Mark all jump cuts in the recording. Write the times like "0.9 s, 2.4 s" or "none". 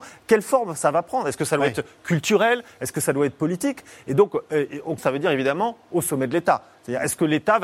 5.0 s